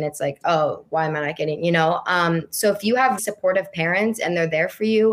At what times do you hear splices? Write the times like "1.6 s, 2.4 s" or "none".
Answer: 3.2 s